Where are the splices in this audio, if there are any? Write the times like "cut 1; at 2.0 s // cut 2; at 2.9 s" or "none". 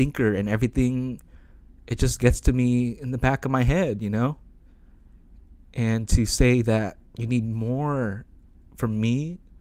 none